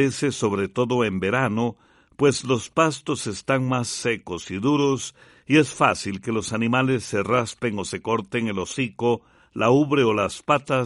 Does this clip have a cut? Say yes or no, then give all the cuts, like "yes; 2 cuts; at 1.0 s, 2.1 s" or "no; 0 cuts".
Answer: no; 0 cuts